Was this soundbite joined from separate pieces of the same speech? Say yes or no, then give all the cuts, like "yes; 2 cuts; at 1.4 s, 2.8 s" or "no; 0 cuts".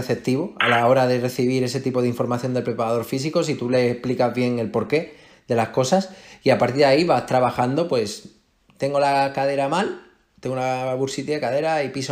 no; 0 cuts